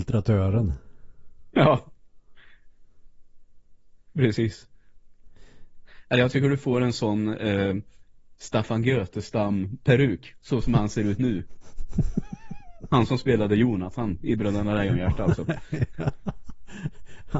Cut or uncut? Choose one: uncut